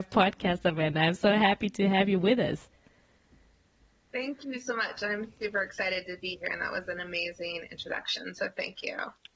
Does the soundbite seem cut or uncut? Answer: uncut